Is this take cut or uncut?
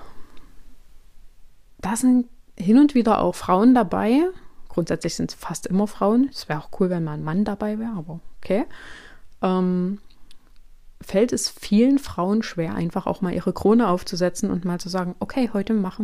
uncut